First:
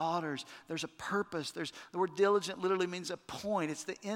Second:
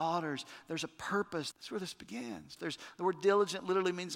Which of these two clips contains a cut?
second; 2 cuts; at 1.5 s, 2.6 s

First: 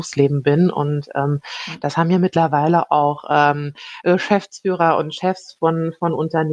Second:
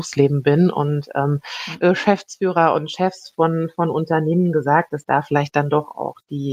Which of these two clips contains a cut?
second; 1 cut; at 1.8 s

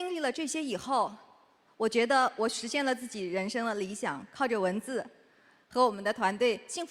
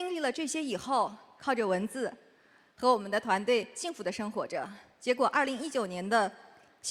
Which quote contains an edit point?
second; 1 cut; at 1.4 s

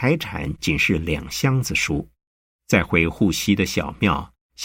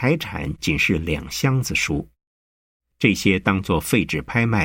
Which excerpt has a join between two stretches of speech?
first; 1 cut; at 2.6 s

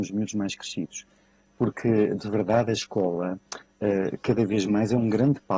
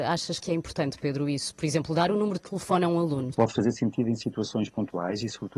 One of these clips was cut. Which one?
second; 1 cut; at 3.3 s

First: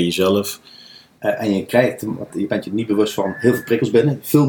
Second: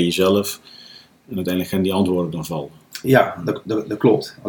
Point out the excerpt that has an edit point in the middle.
first; 2 cuts; at 1.2 s, 2.3 s

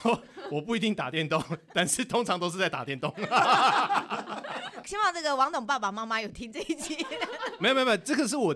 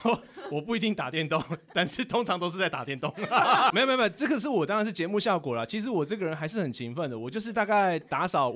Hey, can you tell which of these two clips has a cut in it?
second; 1 cut; at 3.7 s

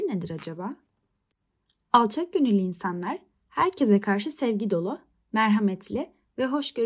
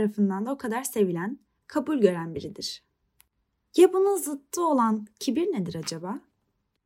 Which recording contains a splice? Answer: second; 1 cut; at 1.6 s

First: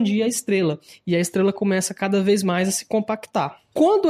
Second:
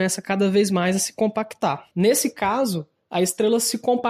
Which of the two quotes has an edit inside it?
second; 1 cut; at 1.9 s

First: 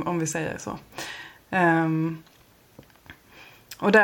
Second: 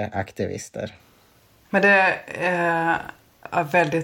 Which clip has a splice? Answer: second; 1 cut; at 1.7 s

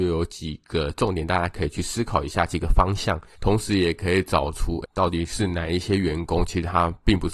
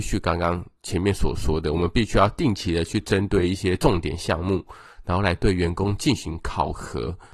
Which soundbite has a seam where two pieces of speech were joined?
first; 2 cuts; at 3.4 s, 4.9 s

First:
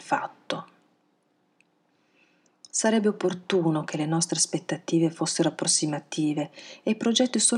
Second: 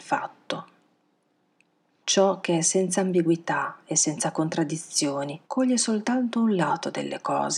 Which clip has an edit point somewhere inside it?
second; 2 cuts; at 2.0 s, 5.4 s

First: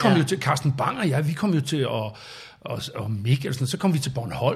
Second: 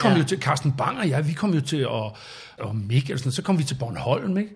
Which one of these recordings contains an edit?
second; 1 cut; at 2.6 s

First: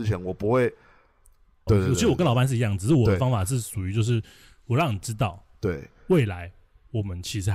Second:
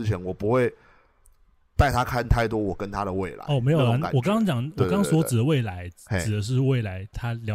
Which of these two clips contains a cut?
first; 1 cut; at 1.7 s

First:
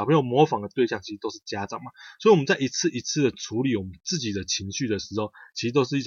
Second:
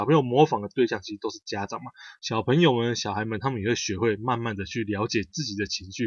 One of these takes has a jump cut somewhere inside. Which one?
second; 1 cut; at 2.2 s

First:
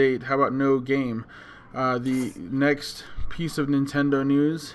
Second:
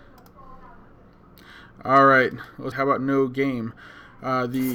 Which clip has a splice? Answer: second; 1 cut; at 2.7 s

